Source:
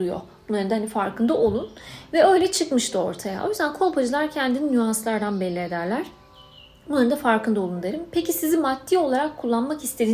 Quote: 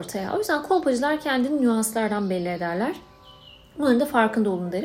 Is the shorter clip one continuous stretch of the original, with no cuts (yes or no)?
yes